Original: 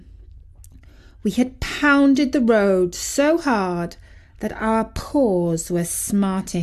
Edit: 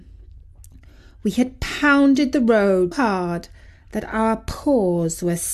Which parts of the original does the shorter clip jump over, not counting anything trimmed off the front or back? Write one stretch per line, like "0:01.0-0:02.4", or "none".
0:02.9-0:03.4